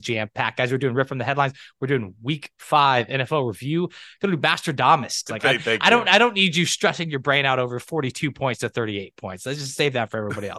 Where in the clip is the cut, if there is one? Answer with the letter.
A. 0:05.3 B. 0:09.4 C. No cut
A